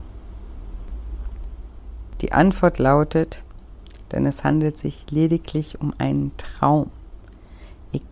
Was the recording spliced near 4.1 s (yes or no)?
yes